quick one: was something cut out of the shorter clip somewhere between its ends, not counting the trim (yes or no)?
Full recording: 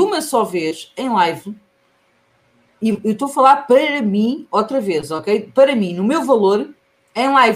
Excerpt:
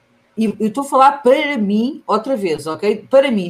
no